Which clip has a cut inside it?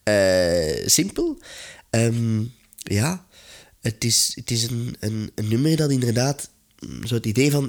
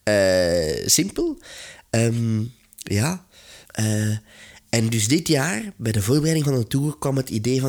second; 1 cut; at 3.6 s

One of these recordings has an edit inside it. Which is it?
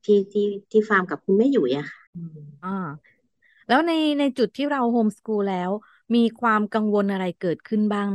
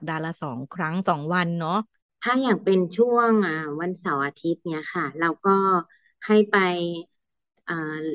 first; 1 cut; at 2.1 s

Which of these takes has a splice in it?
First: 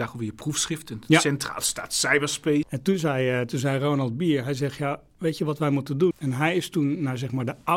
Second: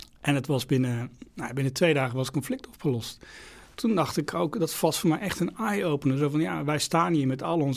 first; 2 cuts; at 2.6 s, 6.1 s

